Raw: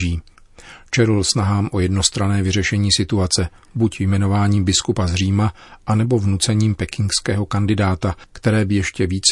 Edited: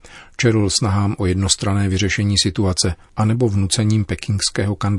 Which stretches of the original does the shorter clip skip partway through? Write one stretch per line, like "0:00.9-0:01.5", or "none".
0:03.6-0:05.8